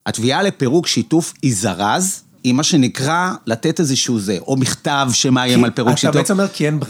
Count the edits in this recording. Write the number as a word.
one